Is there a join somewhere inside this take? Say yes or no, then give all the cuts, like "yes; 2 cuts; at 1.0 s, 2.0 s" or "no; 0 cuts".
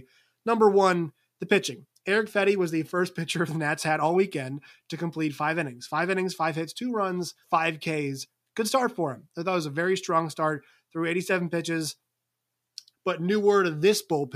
yes; 2 cuts; at 7.4 s, 12.9 s